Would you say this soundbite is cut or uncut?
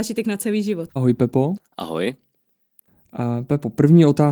cut